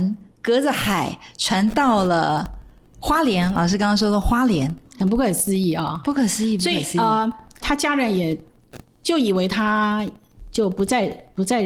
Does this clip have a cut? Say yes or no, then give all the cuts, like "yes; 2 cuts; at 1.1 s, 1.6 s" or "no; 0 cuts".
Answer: yes; 2 cuts; at 4.9 s, 7.6 s